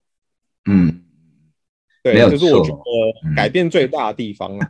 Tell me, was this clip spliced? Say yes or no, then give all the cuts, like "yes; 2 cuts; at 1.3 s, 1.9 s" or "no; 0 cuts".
no; 0 cuts